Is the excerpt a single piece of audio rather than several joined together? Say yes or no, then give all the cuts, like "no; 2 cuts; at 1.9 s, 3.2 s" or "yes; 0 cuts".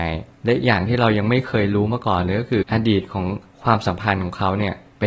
no; 1 cut; at 2.6 s